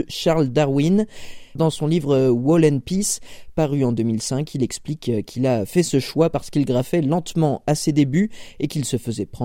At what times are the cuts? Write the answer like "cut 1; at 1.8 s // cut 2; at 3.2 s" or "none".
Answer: cut 1; at 1.6 s